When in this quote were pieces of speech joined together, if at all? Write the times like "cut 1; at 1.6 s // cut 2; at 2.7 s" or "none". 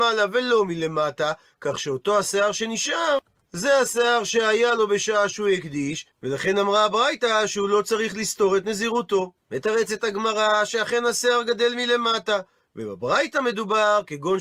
cut 1; at 9.4 s

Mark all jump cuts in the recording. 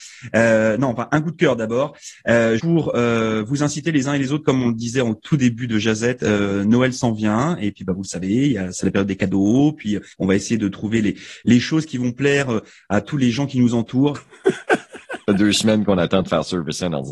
cut 1; at 2.6 s // cut 2; at 10.1 s // cut 3; at 14.1 s

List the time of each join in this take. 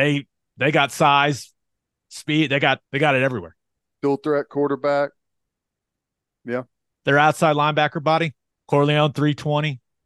cut 1; at 2.9 s // cut 2; at 6.9 s // cut 3; at 8.5 s

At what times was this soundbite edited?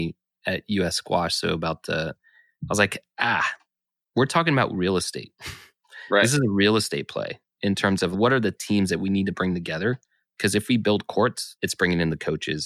cut 1; at 2.2 s // cut 2; at 11.6 s

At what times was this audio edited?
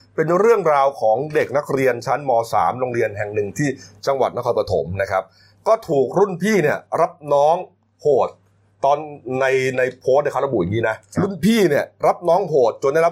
cut 1; at 11.1 s

